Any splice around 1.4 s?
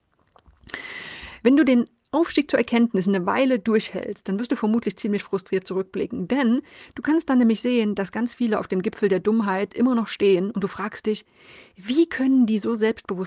yes; 1 cut; at 1.4 s

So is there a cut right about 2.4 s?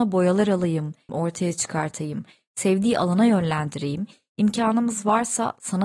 no; 1 cut; at 1.1 s

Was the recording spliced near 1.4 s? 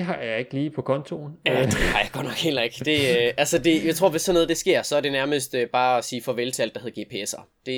no; 0 cuts

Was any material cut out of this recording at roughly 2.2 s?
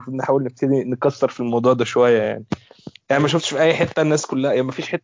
no; 0 cuts

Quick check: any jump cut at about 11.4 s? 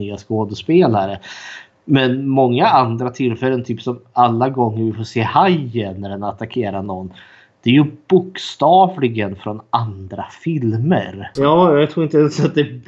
yes; 1 cut; at 11.4 s

